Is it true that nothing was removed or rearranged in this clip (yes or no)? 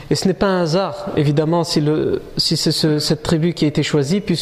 yes